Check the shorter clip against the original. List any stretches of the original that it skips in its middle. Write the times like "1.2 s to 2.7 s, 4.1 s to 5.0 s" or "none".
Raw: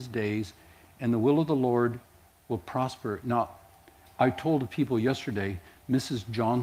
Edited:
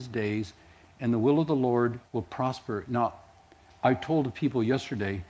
2.1 s to 2.4 s